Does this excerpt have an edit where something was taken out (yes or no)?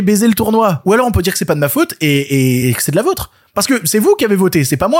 no